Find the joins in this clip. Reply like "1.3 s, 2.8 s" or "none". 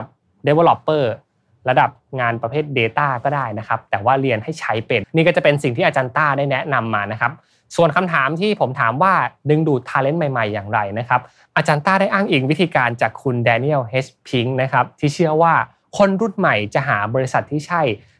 5.0 s